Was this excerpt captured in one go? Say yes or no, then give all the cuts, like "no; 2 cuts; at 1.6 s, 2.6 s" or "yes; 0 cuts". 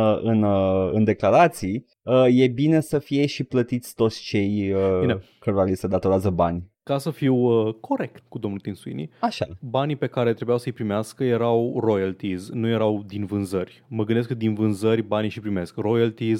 yes; 0 cuts